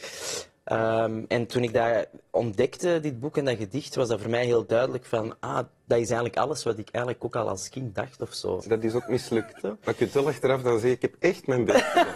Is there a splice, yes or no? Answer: yes